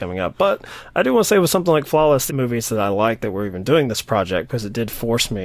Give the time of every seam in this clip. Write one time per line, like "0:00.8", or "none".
0:02.3